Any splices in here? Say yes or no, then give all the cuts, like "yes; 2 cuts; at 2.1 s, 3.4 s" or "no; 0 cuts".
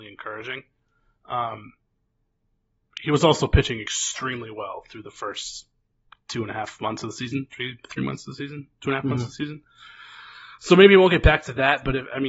no; 0 cuts